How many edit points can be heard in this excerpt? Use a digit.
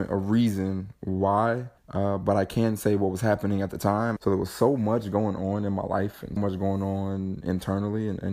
3